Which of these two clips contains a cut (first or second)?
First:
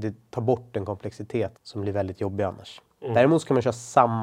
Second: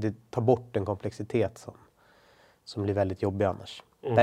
first